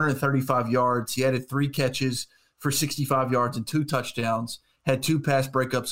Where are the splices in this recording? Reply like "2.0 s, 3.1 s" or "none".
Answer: none